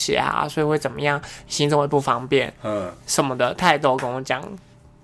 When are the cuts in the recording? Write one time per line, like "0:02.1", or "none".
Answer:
none